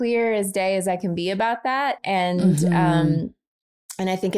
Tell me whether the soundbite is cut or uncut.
cut